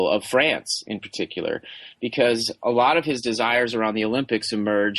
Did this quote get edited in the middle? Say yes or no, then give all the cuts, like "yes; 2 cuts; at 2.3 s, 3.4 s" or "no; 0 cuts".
no; 0 cuts